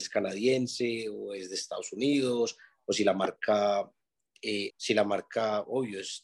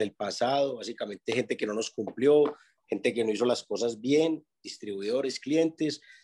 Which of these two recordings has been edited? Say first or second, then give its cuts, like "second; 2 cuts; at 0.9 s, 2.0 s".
first; 1 cut; at 4.7 s